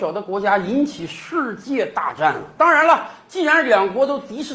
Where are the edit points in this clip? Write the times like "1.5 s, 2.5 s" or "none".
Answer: 2.6 s